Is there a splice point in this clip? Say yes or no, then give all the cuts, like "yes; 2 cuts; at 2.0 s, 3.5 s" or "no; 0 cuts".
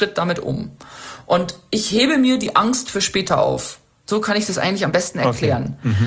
no; 0 cuts